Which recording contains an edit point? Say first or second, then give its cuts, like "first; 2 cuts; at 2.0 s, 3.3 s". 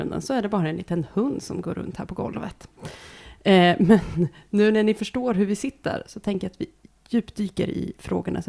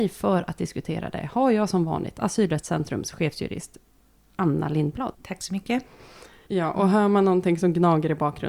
second; 2 cuts; at 5.1 s, 6.5 s